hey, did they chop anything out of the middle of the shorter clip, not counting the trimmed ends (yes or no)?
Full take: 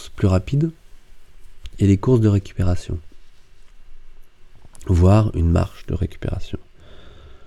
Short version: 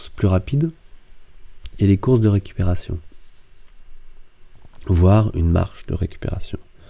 no